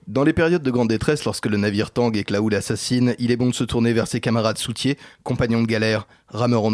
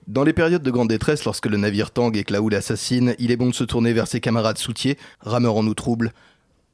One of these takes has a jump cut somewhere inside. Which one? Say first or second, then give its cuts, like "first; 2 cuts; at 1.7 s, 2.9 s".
second; 1 cut; at 5.1 s